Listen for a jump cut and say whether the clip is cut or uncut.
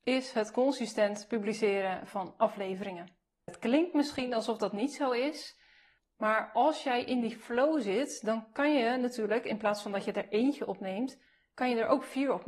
cut